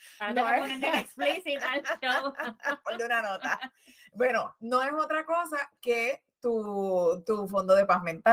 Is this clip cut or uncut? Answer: uncut